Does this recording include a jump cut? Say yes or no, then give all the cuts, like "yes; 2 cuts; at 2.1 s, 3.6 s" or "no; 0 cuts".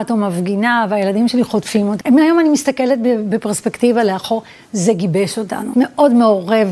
yes; 2 cuts; at 2.0 s, 5.7 s